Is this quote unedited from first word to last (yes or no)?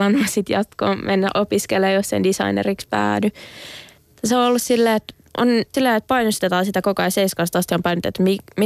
no